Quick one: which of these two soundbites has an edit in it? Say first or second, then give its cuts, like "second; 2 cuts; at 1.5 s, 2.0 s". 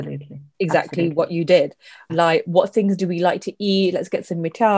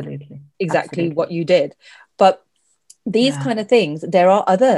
first; 1 cut; at 2.1 s